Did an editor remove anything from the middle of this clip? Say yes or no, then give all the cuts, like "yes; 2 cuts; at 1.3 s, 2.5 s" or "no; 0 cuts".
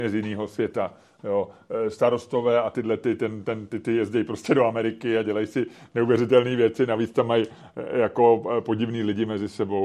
no; 0 cuts